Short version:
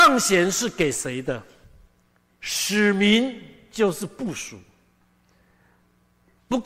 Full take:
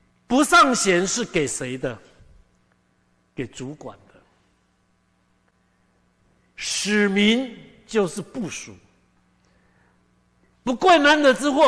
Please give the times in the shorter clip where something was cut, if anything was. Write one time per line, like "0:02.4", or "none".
0:02.3